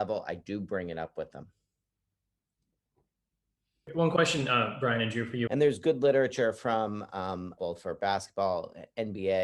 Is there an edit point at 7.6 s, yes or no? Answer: yes